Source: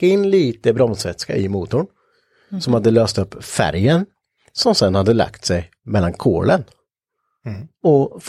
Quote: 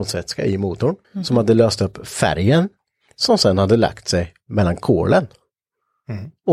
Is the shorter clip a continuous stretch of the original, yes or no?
no